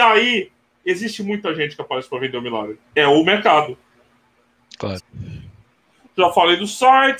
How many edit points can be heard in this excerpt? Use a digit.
2